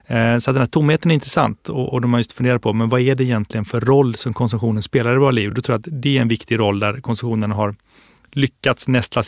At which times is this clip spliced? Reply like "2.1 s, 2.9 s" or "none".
none